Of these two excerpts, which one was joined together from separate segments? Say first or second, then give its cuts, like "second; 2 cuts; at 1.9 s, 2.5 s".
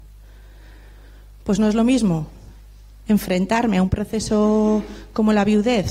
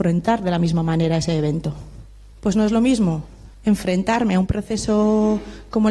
second; 2 cuts; at 2.3 s, 3.5 s